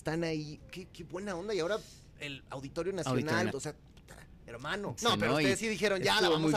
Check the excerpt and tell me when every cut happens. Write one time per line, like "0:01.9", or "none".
0:00.9
0:03.5
0:05.0